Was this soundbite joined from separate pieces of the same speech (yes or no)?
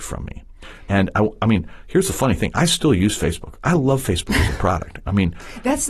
no